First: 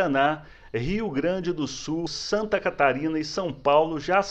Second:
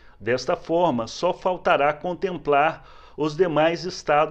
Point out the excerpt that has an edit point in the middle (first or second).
first